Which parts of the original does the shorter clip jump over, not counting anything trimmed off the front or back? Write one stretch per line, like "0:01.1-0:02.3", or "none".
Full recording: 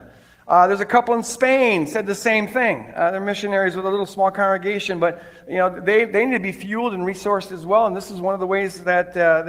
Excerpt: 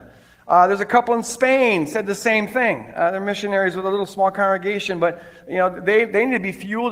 none